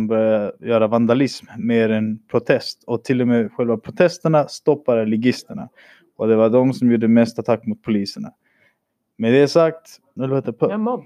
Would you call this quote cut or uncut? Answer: cut